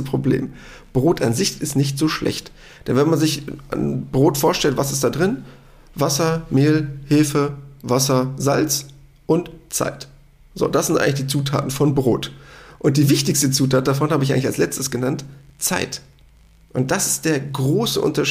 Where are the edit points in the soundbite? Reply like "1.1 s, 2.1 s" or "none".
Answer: none